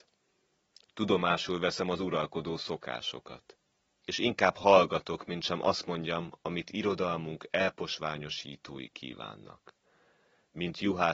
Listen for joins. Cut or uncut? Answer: uncut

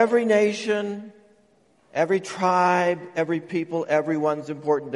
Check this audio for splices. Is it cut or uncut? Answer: uncut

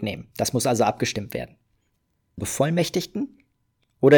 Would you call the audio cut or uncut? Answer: cut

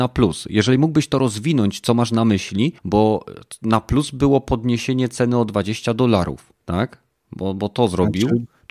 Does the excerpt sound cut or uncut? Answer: cut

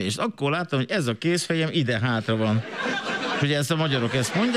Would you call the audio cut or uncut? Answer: cut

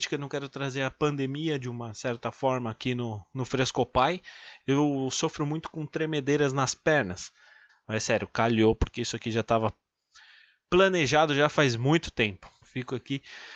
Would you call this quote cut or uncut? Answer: cut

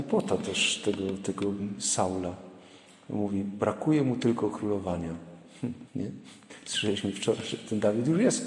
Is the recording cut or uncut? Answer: cut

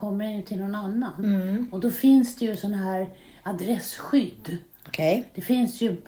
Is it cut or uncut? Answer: uncut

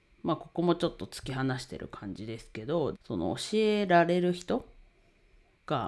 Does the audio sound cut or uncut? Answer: cut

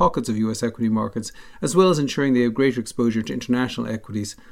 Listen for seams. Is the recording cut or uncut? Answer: uncut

